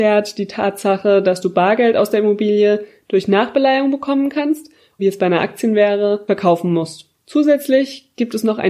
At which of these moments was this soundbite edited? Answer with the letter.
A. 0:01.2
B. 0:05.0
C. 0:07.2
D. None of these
B